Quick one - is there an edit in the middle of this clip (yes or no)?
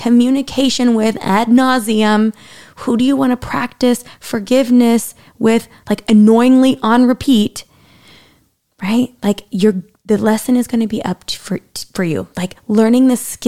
no